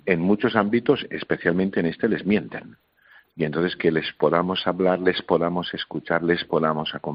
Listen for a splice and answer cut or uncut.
uncut